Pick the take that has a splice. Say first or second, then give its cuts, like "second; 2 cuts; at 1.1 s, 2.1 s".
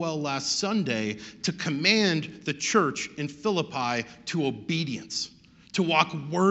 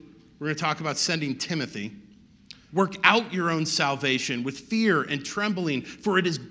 second; 1 cut; at 2.7 s